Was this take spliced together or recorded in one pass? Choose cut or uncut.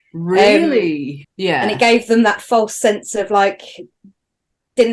cut